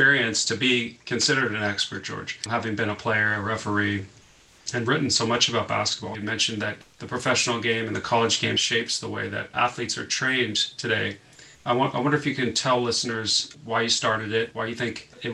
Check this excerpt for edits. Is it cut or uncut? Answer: cut